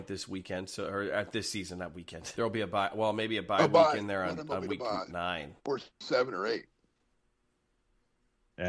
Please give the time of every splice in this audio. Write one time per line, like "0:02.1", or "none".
0:02.3
0:05.6

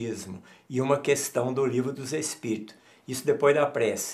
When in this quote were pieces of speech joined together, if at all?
none

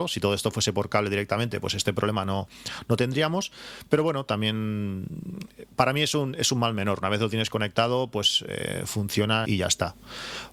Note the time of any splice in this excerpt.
0:09.5

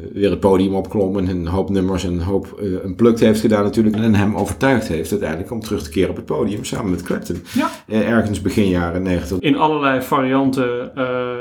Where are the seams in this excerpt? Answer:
0:03.9
0:09.4

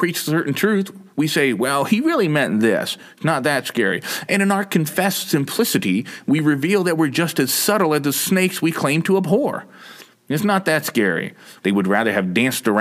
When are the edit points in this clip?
0:10.1
0:11.6

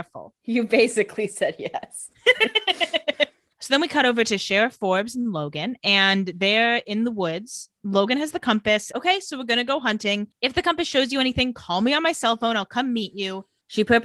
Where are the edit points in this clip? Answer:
0:08.9

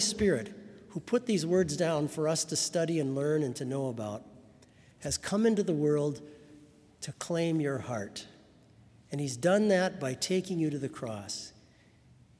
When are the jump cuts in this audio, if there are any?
none

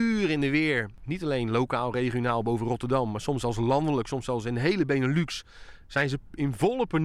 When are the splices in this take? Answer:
none

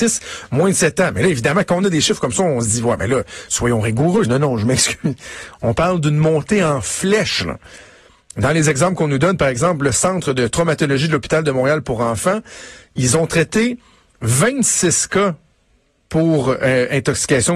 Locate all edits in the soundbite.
0:04.2

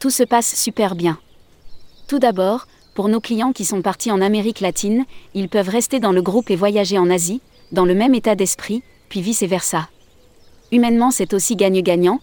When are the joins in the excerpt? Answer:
none

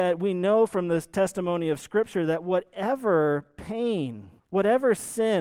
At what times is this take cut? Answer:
0:04.4

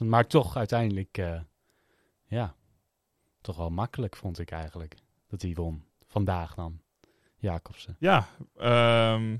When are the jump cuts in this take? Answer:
none

